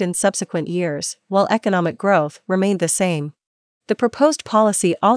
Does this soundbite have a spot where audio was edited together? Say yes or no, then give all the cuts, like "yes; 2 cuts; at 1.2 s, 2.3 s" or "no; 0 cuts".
yes; 1 cut; at 3.8 s